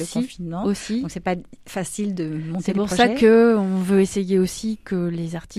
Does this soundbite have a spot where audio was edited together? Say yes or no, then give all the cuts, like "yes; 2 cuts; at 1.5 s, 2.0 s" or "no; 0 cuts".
no; 0 cuts